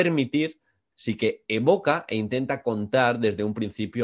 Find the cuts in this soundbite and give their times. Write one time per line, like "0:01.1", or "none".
0:00.9

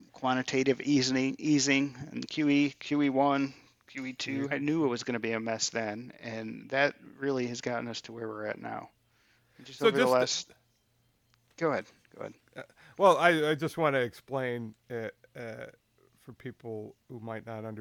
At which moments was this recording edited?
0:04.4

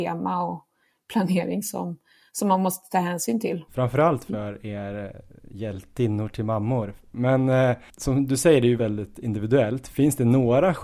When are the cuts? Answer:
0:03.7
0:08.8

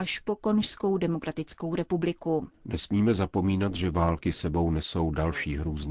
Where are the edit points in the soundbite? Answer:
0:02.5

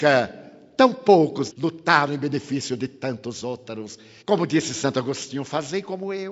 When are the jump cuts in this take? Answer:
0:01.5
0:04.2

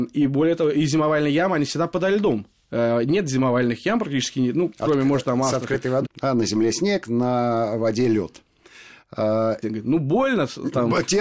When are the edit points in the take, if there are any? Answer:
0:06.0
0:09.6

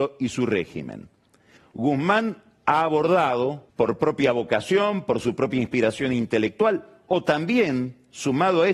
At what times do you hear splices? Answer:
0:01.6
0:03.7

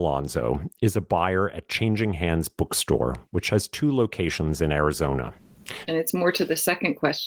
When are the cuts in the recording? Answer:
0:05.9

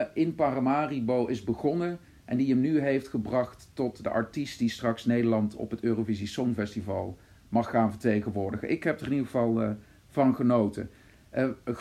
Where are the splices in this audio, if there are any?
none

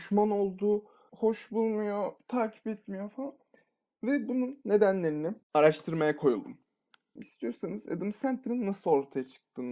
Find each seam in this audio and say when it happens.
0:01.1
0:05.4
0:07.2

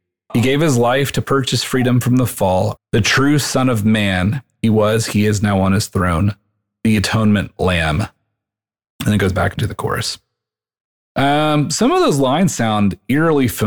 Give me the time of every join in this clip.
0:02.8

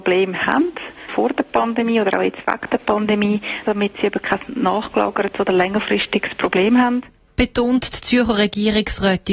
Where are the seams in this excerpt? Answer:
0:01.1
0:03.6

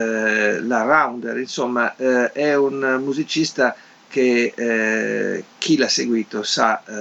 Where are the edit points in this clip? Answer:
none

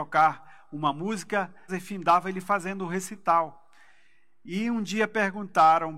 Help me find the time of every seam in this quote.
0:01.7

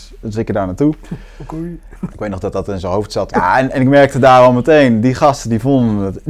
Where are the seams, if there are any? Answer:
0:02.1
0:03.3

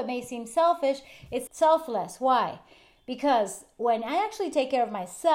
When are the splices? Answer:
0:01.5

